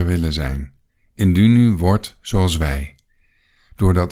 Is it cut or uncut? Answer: uncut